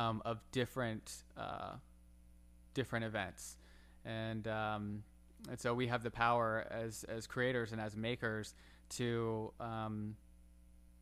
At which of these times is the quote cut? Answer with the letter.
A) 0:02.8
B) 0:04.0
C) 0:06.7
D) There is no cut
D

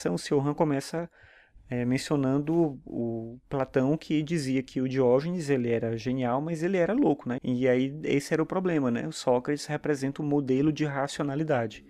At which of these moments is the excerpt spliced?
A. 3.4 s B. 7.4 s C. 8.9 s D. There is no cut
B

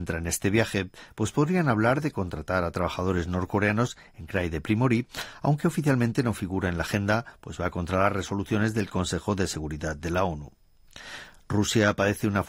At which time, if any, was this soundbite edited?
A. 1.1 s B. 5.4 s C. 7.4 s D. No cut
D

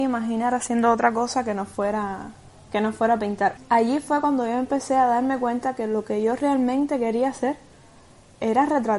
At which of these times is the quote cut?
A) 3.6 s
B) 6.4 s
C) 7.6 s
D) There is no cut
A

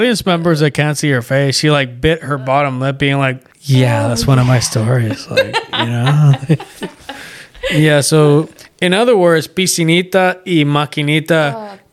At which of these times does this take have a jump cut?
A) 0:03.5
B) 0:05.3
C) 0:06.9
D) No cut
A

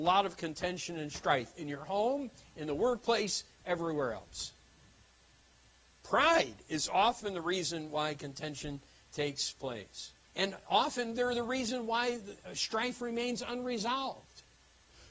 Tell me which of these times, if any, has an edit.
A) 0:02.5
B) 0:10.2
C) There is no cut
B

